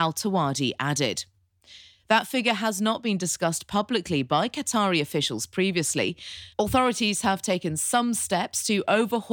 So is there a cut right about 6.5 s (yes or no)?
yes